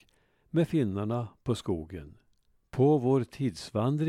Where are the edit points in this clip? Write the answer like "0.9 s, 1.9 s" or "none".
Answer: 2.6 s